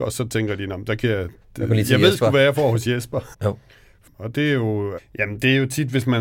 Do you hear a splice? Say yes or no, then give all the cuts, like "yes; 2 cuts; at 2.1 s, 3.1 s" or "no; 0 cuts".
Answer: yes; 2 cuts; at 3.3 s, 5.0 s